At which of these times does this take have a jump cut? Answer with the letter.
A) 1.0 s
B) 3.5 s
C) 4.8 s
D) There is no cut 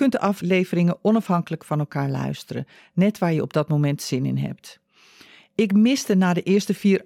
D